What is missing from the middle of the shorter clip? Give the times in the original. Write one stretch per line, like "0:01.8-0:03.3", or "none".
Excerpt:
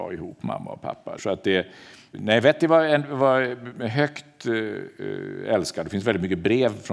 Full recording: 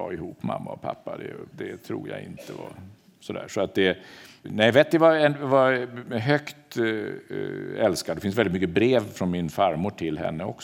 0:01.2-0:03.5